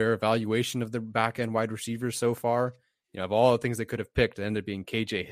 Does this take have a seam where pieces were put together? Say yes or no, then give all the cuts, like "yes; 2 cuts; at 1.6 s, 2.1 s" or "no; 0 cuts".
no; 0 cuts